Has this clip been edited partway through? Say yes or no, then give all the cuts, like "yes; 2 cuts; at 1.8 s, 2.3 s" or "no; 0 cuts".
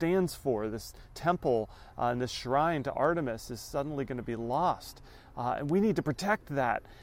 no; 0 cuts